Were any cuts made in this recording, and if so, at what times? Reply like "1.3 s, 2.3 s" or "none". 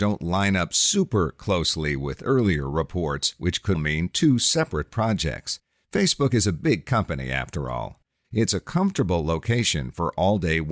3.7 s, 8.2 s